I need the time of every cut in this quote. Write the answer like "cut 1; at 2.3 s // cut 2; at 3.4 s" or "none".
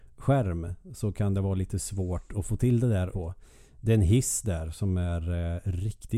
cut 1; at 3.1 s